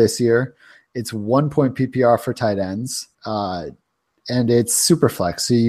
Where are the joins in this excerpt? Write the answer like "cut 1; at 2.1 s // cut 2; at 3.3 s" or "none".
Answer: cut 1; at 3.1 s